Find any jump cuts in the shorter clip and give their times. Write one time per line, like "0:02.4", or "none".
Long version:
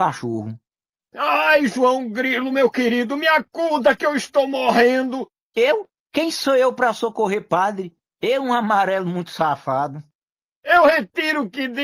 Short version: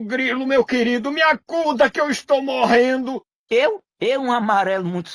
0:03.9